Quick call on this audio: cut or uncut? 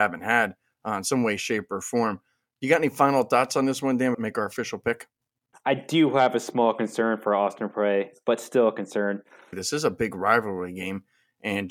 cut